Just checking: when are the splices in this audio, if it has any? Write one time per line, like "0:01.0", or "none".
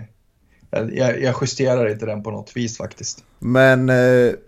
0:03.4

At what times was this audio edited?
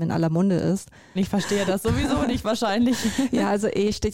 0:01.2

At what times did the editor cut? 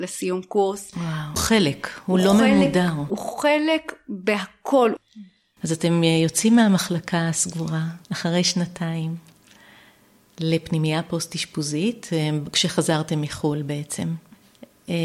0:01.4
0:08.0

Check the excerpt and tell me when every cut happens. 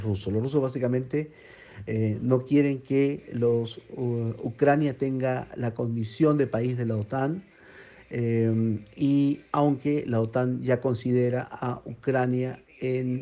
none

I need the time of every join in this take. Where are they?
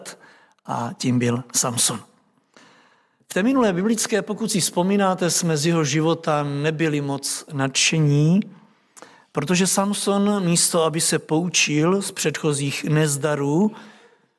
none

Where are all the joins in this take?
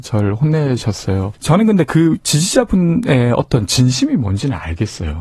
0:01.3

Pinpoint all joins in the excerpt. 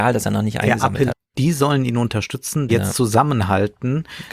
0:01.1
0:02.7

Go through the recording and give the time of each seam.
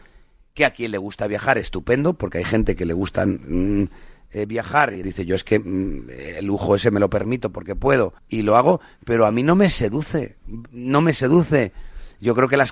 0:05.0
0:08.2

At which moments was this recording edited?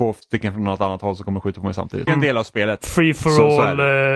0:02.1

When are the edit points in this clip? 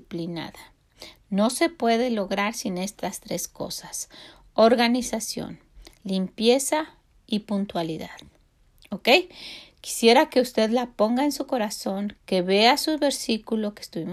0:12.2

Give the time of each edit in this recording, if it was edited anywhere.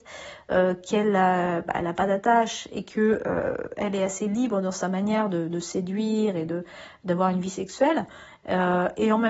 none

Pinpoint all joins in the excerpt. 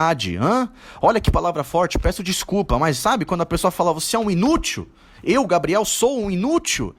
none

